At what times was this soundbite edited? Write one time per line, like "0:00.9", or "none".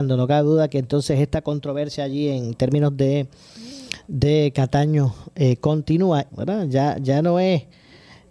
0:06.3